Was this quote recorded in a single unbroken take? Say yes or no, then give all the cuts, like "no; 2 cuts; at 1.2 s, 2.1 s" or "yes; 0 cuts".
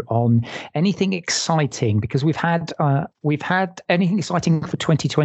yes; 0 cuts